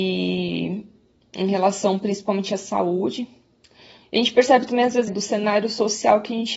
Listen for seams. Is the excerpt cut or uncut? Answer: cut